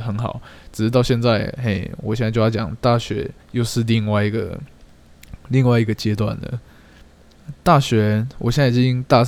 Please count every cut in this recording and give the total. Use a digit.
1